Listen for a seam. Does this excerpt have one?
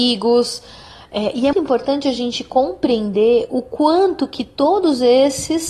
yes; 1 cut; at 1.5 s

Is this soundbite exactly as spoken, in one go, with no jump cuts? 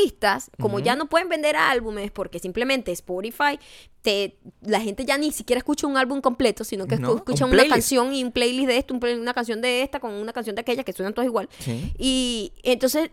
yes; 0 cuts

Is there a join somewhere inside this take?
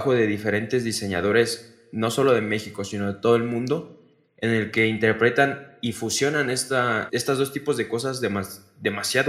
yes; 1 cut; at 7.1 s

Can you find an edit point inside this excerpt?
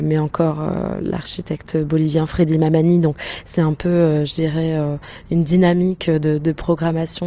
no; 0 cuts

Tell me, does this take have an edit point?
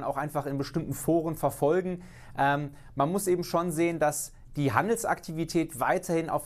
no; 0 cuts

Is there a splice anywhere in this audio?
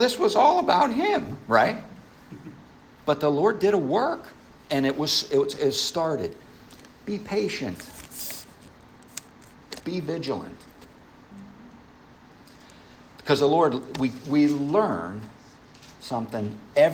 no; 0 cuts

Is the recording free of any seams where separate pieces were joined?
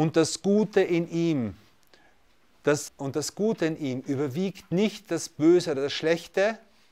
no; 1 cut; at 2.9 s

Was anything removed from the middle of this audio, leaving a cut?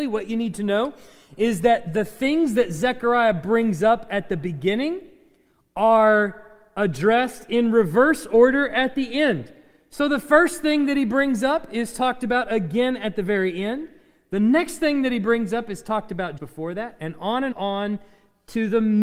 yes; 2 cuts; at 16.4 s, 17.5 s

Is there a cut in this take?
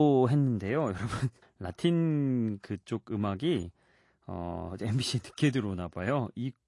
yes; 1 cut; at 1.4 s

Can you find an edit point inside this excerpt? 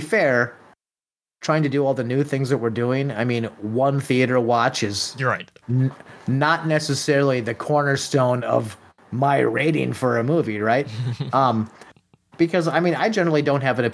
no; 0 cuts

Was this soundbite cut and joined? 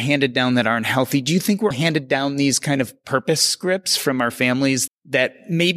yes; 2 cuts; at 1.7 s, 4.9 s

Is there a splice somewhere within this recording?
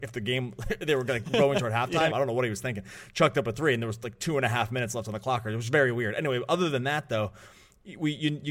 yes; 1 cut; at 2.1 s

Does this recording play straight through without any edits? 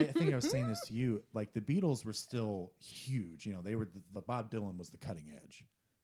no; 1 cut; at 4.1 s

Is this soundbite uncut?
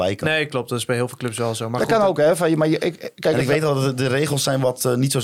yes; 0 cuts

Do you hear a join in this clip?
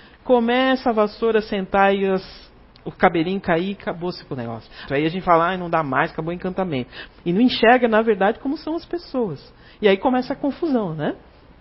yes; 2 cuts; at 4.9 s, 7.1 s

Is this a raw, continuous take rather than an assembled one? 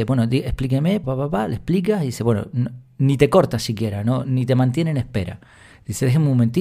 no; 1 cut; at 1.0 s

